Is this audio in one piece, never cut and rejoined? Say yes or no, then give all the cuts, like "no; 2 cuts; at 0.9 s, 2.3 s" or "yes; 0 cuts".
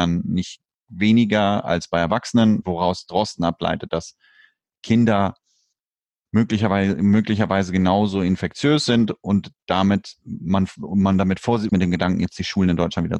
no; 2 cuts; at 2.6 s, 11.7 s